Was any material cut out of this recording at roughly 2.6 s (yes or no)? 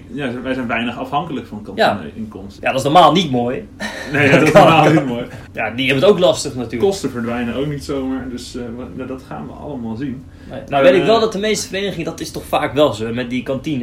yes